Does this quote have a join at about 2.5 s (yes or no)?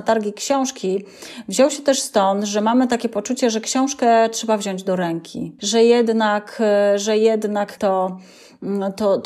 no